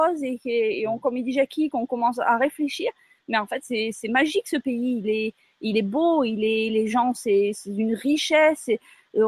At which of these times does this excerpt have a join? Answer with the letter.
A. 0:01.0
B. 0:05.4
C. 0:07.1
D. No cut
D